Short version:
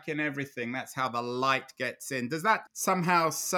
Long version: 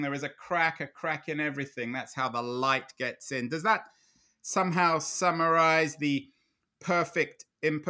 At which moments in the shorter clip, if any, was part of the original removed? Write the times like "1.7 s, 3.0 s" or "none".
2.7 s